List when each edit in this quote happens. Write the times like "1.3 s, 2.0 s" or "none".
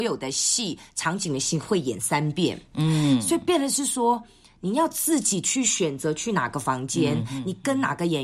none